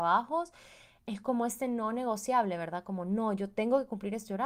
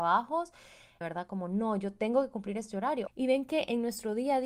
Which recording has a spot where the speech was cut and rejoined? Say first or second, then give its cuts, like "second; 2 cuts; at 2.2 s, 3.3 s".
second; 2 cuts; at 1.0 s, 3.1 s